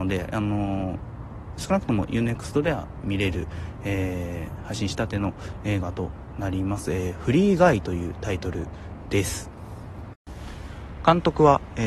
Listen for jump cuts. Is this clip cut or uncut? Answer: uncut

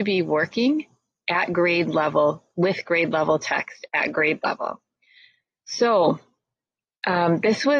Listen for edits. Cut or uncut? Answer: uncut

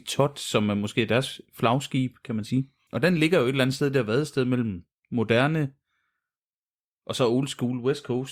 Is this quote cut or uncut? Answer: cut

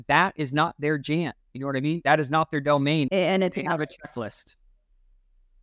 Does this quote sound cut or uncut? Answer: cut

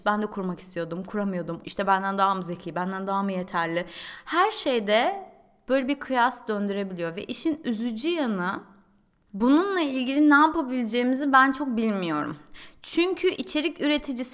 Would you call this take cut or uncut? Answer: cut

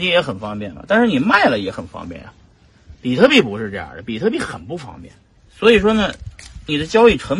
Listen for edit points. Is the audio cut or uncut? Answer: cut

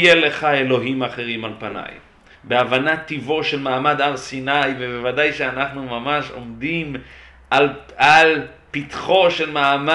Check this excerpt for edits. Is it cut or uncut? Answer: cut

